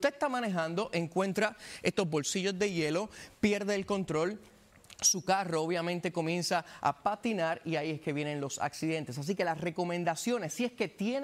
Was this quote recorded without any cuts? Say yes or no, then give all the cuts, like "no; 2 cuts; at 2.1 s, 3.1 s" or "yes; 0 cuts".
yes; 0 cuts